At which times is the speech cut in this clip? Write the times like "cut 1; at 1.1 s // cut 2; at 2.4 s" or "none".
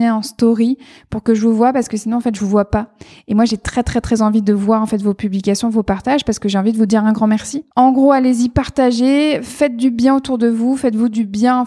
cut 1; at 7.7 s